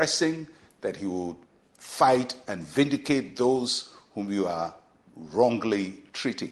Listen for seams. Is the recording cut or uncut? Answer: uncut